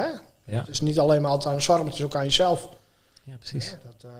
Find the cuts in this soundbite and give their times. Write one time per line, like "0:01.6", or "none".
none